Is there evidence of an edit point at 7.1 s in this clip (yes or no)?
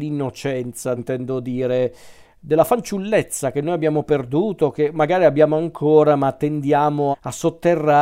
yes